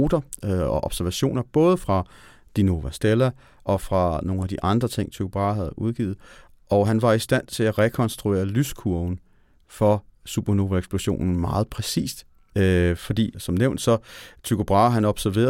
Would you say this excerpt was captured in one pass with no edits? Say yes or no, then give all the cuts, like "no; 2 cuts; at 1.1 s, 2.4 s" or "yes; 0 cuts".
yes; 0 cuts